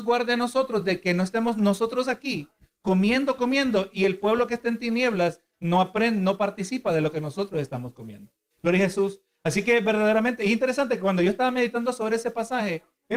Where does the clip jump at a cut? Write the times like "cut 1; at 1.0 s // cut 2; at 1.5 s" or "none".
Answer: cut 1; at 3.4 s // cut 2; at 8.5 s